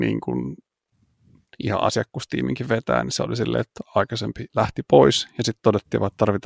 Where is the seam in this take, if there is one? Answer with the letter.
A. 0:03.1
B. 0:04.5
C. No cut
B